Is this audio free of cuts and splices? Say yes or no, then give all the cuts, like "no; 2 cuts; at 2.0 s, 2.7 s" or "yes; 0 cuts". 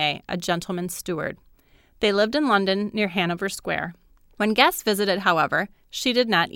no; 1 cut; at 4.2 s